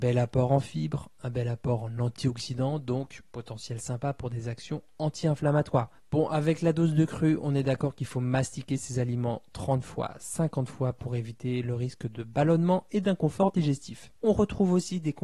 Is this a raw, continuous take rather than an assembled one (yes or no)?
no